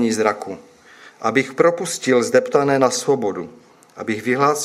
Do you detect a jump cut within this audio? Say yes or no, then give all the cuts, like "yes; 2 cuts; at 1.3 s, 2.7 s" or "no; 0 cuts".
no; 0 cuts